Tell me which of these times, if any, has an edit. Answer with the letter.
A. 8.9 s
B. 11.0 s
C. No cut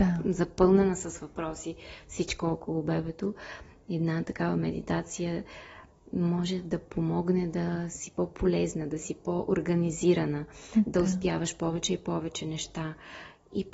C